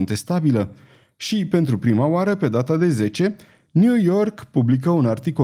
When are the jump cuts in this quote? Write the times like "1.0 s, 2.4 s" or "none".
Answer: none

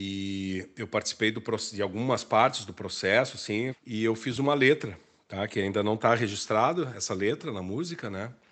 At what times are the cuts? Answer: 3.7 s

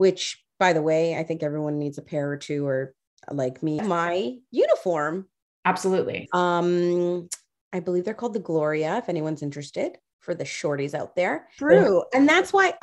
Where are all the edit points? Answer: 3.8 s, 6.3 s, 11.6 s

